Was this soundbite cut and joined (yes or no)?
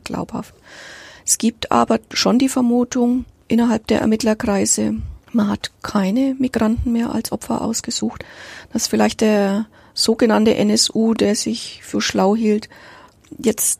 yes